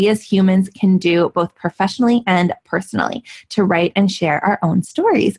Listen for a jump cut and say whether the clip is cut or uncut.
uncut